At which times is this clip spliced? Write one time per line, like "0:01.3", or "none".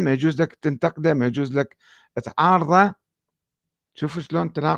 none